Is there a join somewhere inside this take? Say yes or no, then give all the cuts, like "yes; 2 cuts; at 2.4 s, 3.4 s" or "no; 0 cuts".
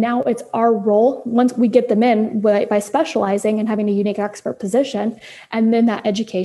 no; 0 cuts